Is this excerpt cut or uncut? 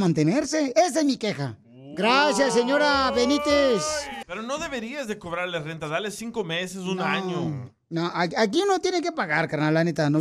cut